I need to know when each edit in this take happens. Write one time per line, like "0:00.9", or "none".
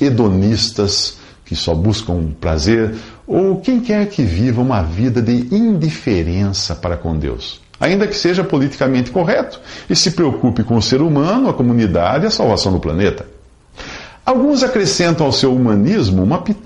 none